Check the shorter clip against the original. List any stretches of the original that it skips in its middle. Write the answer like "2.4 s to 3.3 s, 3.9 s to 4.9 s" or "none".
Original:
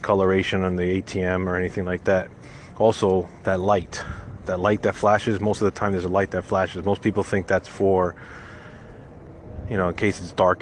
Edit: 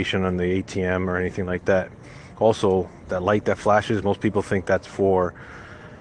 3.4 s to 4.4 s, 5.4 s to 6.8 s